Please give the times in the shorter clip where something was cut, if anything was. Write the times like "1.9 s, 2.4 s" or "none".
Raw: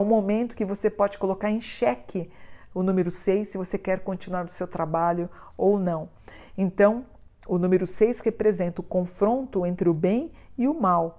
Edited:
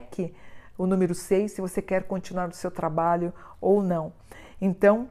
none